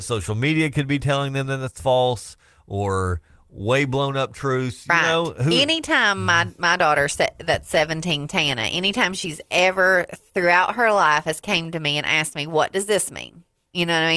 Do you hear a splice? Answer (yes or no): no